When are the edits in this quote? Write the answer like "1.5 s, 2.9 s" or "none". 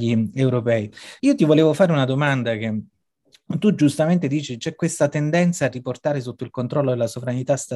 none